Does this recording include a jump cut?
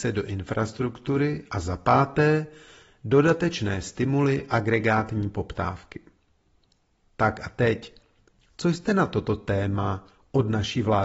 no; 0 cuts

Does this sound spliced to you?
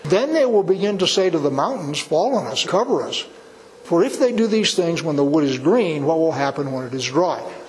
yes; 1 cut; at 2.6 s

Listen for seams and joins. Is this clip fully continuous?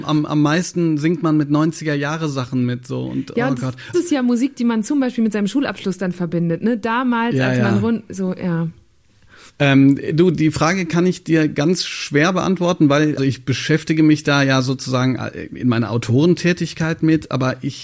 no; 3 cuts; at 3.9 s, 9.5 s, 13.2 s

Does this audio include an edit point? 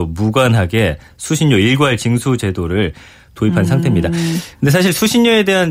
no; 0 cuts

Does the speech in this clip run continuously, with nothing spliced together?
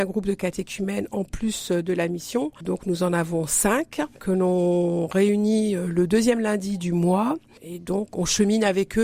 no; 2 cuts; at 4.1 s, 8.1 s

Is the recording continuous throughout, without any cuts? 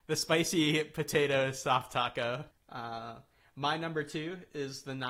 no; 1 cut; at 2.5 s

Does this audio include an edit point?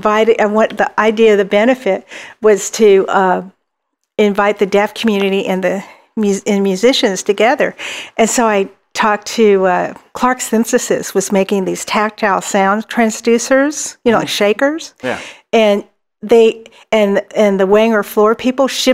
no; 0 cuts

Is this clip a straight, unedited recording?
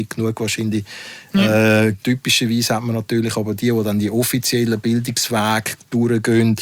no; 1 cut; at 2.0 s

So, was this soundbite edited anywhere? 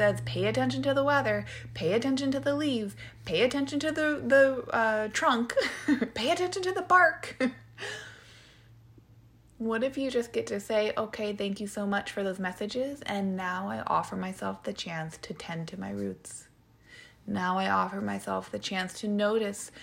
no; 0 cuts

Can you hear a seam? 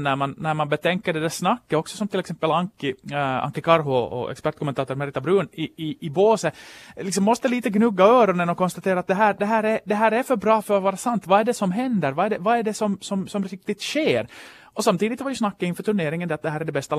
no; 0 cuts

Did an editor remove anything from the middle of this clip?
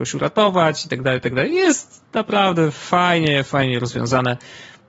no; 0 cuts

